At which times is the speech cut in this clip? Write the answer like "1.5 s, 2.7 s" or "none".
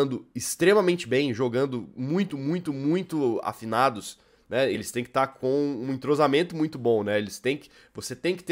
2.3 s, 4.7 s